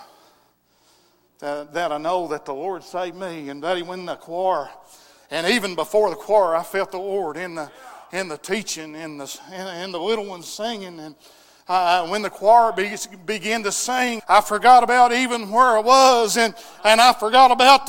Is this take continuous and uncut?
no; 1 cut; at 14.2 s

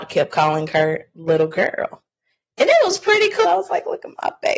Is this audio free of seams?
no; 1 cut; at 3.4 s

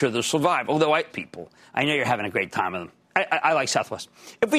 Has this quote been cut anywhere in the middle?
yes; 2 cuts; at 1.1 s, 3.0 s

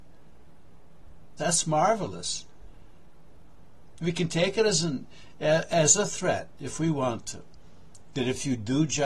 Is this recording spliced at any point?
yes; 1 cut; at 1.4 s

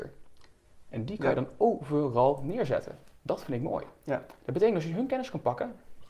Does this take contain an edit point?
no; 0 cuts

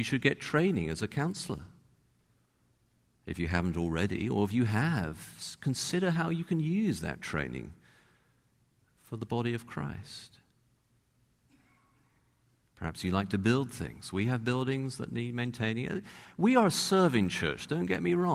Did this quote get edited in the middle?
no; 0 cuts

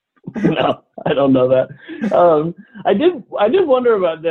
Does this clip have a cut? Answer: no; 0 cuts

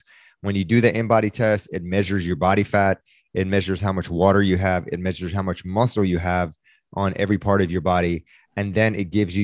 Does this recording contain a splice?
no; 0 cuts

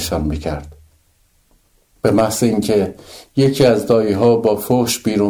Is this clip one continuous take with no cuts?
no; 1 cut; at 1.9 s

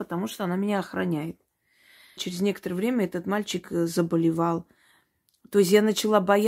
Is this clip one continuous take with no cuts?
no; 1 cut; at 2.2 s

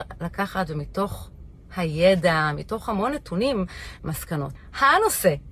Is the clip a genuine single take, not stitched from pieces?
no; 1 cut; at 4.0 s

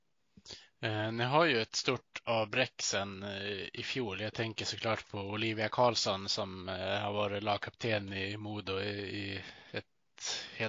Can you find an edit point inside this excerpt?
no; 0 cuts

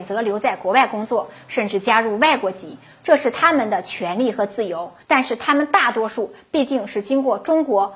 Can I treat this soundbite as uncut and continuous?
yes; 0 cuts

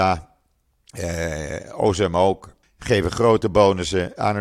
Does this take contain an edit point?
yes; 1 cut; at 2.6 s

